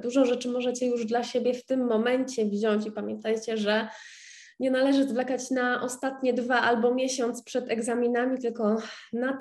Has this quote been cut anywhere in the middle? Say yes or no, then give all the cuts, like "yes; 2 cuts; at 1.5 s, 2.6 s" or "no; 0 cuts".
no; 0 cuts